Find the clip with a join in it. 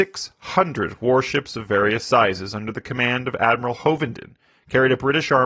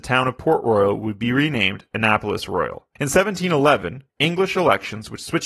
second; 2 cuts; at 3.0 s, 4.1 s

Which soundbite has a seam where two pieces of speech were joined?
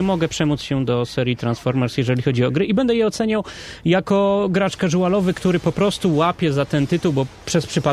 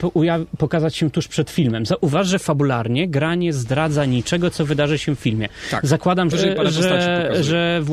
second; 1 cut; at 6.3 s

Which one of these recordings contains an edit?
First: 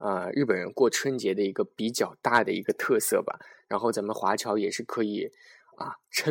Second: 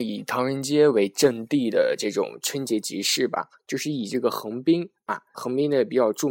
second; 1 cut; at 5.3 s

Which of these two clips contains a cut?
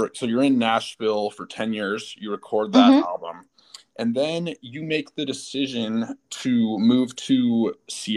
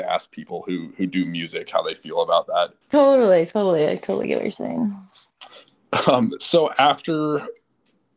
second; 1 cut; at 2.8 s

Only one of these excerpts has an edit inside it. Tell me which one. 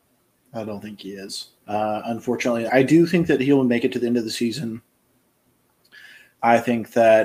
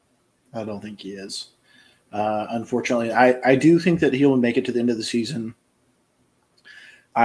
first; 2 cuts; at 1.6 s, 2.7 s

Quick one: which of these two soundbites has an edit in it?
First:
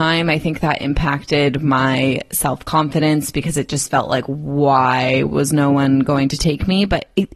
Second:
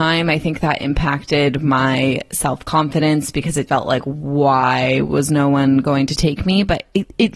second; 1 cut; at 3.7 s

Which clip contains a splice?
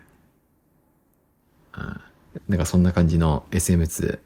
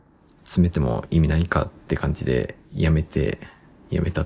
first; 1 cut; at 2.4 s

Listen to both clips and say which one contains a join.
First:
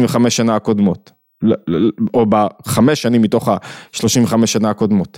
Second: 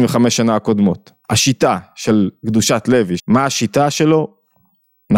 second; 2 cuts; at 1.2 s, 3.2 s

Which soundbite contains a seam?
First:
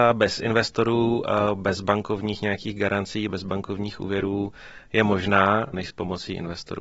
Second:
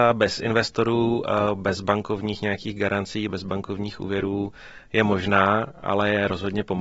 first; 1 cut; at 5.7 s

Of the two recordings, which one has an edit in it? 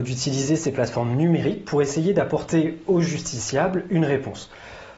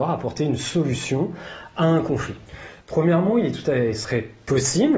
second; 1 cut; at 2.8 s

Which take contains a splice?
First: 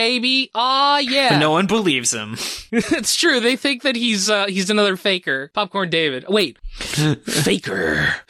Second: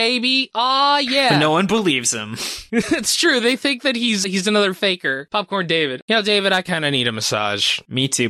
second; 2 cuts; at 4.2 s, 6.0 s

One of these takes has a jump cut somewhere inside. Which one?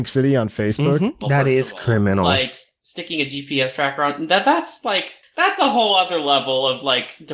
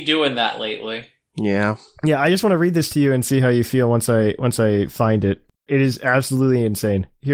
first; 1 cut; at 1.2 s

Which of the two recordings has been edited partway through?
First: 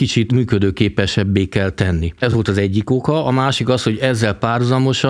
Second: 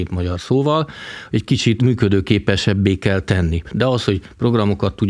second; 1 cut; at 3.6 s

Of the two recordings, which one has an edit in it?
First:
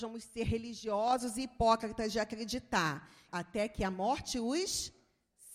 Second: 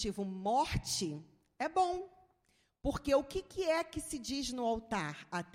first; 1 cut; at 3.3 s

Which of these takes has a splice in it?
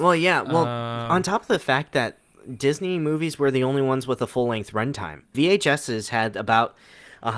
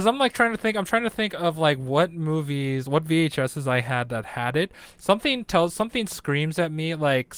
first; 1 cut; at 5.3 s

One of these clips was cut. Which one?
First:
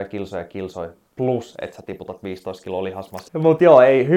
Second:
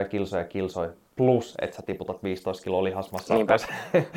first; 1 cut; at 3.3 s

